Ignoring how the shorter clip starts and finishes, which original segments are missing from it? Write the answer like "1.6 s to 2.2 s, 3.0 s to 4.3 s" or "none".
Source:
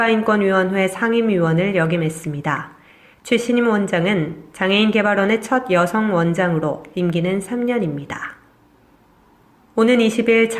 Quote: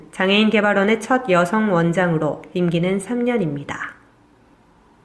none